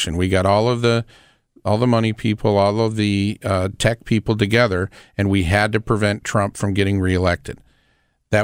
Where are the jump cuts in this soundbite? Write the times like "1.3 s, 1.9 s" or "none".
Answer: none